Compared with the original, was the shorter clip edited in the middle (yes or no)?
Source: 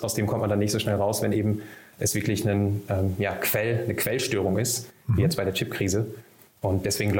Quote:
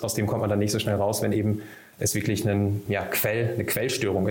yes